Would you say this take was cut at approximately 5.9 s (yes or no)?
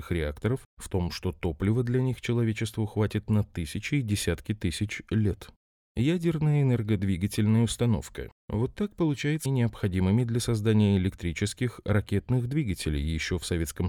no